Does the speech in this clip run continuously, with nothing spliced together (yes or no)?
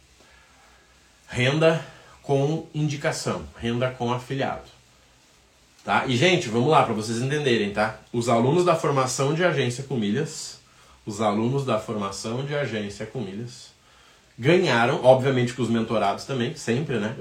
yes